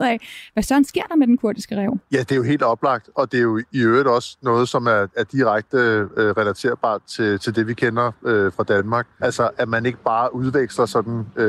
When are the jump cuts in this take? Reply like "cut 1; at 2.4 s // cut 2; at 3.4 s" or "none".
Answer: cut 1; at 2.0 s // cut 2; at 9.2 s